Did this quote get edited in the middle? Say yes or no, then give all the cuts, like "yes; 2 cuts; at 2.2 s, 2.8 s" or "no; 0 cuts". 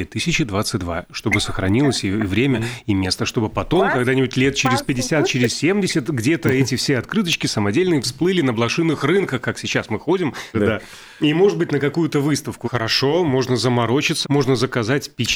yes; 3 cuts; at 10.5 s, 12.6 s, 14.2 s